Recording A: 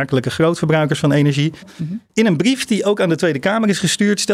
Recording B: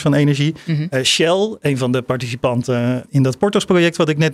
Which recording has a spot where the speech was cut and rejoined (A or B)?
A